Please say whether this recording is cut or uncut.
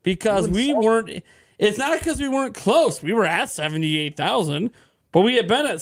uncut